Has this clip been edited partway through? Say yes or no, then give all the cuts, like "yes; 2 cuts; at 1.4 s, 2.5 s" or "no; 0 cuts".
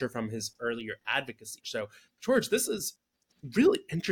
yes; 1 cut; at 1.6 s